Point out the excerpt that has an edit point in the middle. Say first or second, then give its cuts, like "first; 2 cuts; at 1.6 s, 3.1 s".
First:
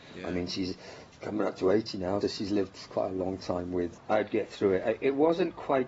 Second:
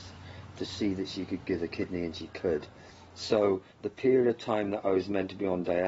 first; 2 cuts; at 2.2 s, 3.9 s